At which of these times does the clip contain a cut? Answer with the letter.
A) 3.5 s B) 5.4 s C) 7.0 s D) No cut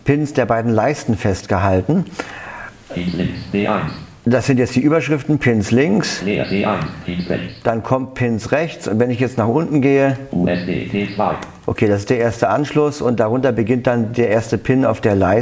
D